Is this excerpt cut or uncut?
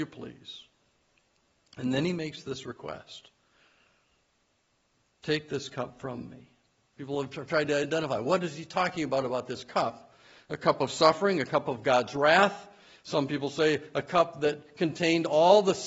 cut